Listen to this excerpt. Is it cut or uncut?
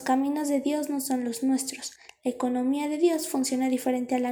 uncut